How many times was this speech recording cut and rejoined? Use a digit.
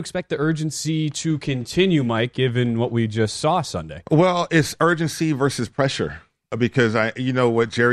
0